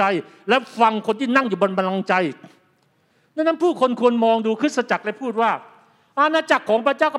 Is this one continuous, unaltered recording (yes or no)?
yes